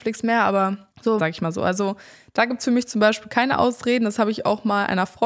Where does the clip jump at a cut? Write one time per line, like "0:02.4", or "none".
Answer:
0:01.2